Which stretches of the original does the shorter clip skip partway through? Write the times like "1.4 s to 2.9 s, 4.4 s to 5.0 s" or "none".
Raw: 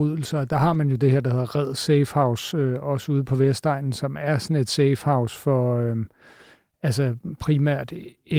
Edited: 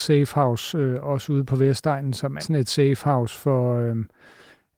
4.2 s to 4.4 s